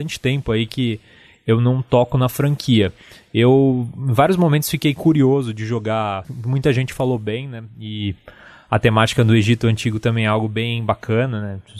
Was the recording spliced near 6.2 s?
yes; 1 cut; at 6.2 s

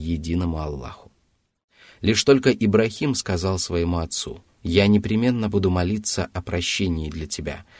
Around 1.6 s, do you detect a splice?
no; 1 cut; at 4.5 s

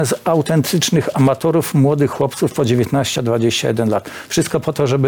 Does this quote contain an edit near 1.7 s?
no; 1 cut; at 3.2 s

